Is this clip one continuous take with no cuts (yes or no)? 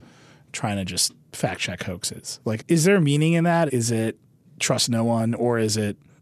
no